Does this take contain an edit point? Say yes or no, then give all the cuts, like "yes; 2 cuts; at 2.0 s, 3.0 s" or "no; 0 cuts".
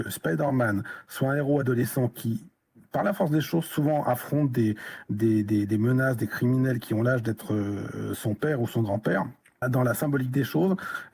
yes; 1 cut; at 9.6 s